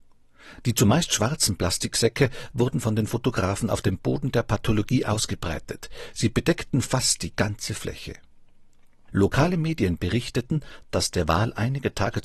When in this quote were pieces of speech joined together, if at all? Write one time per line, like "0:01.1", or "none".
0:09.1